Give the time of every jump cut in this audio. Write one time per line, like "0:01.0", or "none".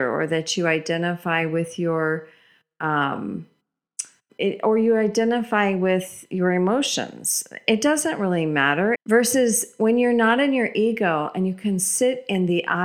0:04.3
0:08.9